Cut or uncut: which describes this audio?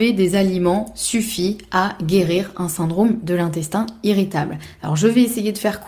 uncut